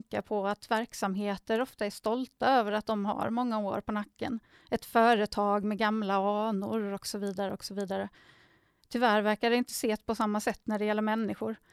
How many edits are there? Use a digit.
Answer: 0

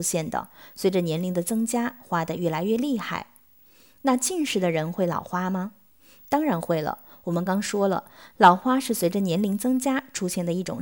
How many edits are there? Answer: 1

